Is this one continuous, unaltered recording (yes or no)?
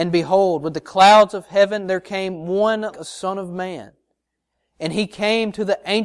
no